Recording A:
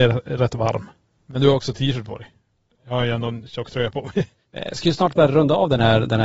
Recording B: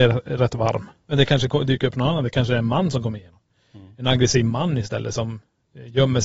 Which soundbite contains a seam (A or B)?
B